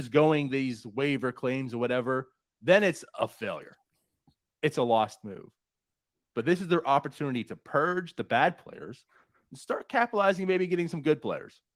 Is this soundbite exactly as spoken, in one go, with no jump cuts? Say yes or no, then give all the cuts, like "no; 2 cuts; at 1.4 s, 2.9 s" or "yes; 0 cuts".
yes; 0 cuts